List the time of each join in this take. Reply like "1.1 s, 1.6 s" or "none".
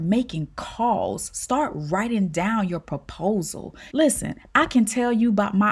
3.9 s